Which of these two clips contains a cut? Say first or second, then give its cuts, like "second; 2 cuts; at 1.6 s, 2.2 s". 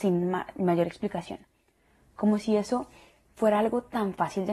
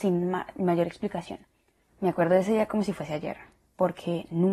second; 1 cut; at 1.8 s